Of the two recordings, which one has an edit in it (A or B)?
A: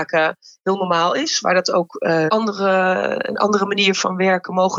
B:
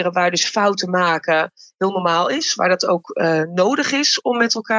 A